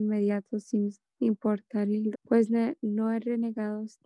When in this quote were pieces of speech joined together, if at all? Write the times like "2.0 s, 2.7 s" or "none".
2.1 s

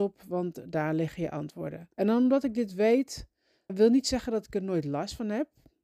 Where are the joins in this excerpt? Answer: 1.9 s, 3.7 s

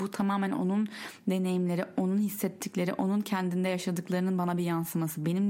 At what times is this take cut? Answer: none

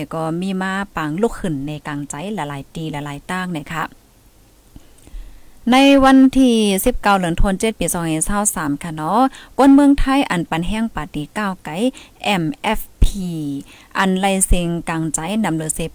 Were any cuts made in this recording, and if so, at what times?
none

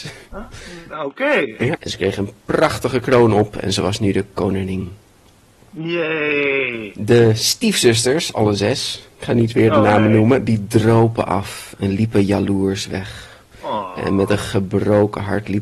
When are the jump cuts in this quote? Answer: 1.7 s

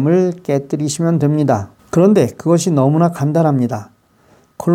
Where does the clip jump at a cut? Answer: 1.8 s

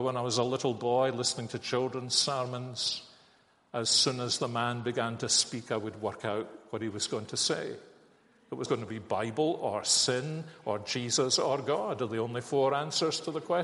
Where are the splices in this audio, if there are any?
8.7 s

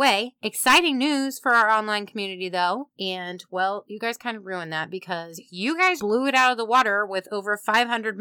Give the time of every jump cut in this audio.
2.9 s, 6.0 s

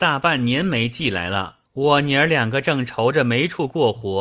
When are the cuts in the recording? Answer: 1.7 s

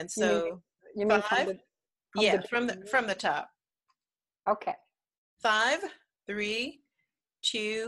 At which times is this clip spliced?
6.2 s

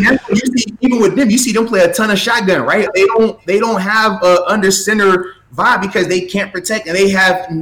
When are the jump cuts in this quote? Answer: 2.9 s

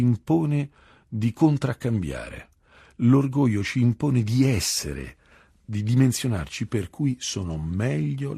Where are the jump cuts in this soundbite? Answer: none

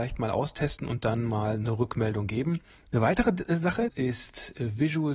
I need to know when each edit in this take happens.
2.8 s, 3.9 s

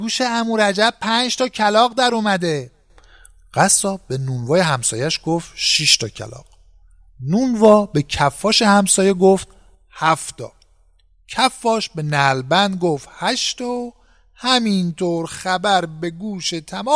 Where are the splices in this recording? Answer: none

